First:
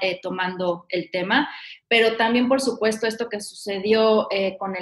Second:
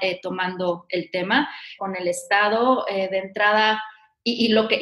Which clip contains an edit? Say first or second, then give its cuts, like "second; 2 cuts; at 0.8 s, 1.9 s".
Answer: second; 1 cut; at 1.8 s